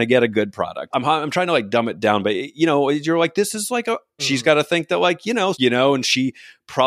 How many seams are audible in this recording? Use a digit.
3